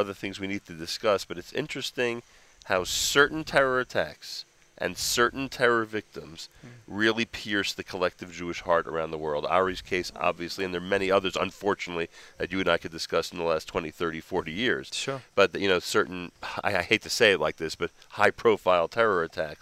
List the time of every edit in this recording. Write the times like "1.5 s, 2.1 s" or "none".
none